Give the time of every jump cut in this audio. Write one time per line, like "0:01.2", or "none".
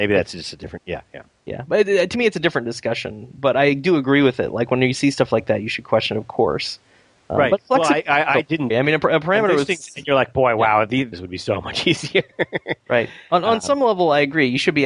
0:08.7
0:11.1